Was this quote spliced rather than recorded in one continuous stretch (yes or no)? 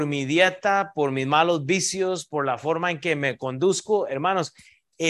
no